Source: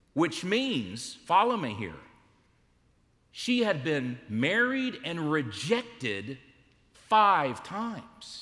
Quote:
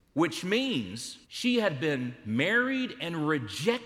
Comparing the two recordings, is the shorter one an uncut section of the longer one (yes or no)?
no